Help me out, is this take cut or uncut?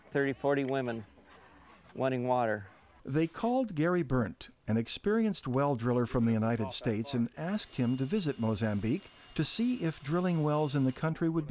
cut